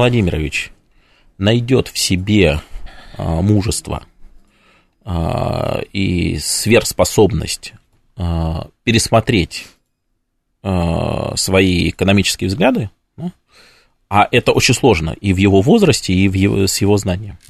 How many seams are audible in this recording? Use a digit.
0